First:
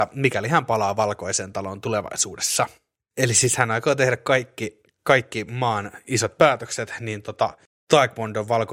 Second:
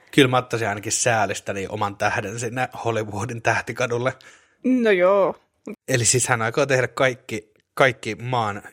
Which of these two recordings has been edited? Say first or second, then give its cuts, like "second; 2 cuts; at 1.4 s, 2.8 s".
second; 1 cut; at 5.7 s